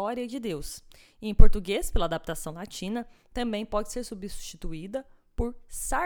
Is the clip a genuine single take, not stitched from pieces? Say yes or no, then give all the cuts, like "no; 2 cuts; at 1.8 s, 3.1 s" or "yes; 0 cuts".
yes; 0 cuts